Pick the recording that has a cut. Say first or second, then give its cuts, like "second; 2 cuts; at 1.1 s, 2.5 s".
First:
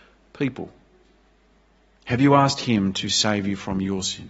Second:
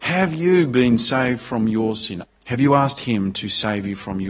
second; 1 cut; at 2.2 s